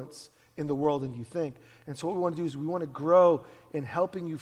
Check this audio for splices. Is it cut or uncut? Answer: uncut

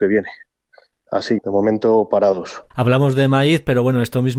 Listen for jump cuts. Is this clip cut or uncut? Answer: cut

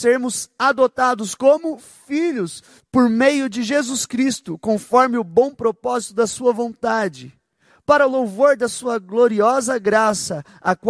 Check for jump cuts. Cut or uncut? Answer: cut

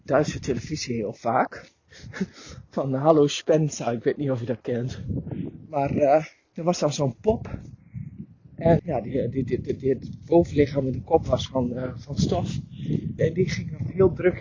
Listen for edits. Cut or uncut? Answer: cut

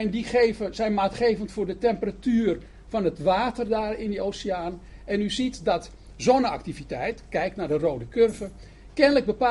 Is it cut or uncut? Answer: uncut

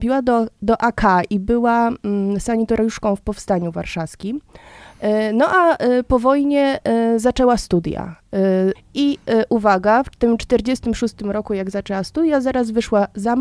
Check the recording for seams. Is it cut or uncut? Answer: cut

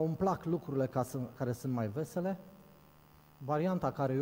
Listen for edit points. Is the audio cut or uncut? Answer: uncut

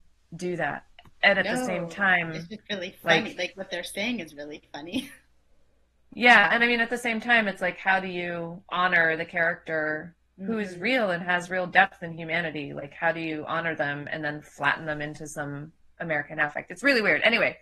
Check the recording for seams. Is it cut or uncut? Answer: uncut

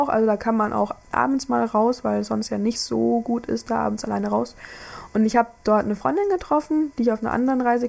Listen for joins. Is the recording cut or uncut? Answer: uncut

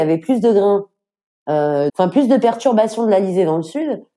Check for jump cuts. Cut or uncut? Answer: cut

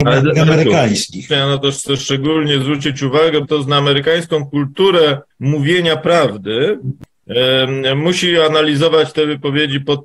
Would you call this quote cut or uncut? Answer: cut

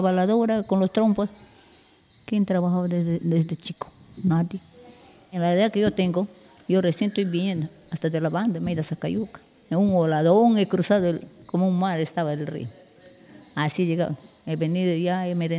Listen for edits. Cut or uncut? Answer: cut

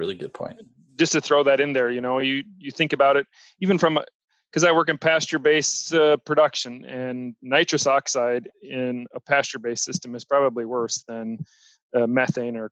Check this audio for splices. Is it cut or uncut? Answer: uncut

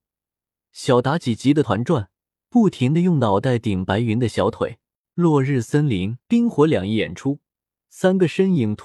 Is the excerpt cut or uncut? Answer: cut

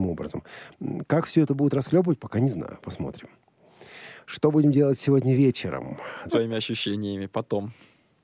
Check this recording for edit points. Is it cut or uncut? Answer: cut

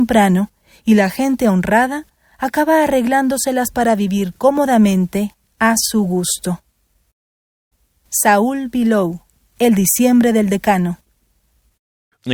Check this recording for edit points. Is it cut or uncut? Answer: uncut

